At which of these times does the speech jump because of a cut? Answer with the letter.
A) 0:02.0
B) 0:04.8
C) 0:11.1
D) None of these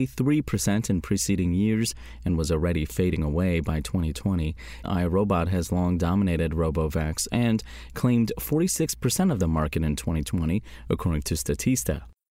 B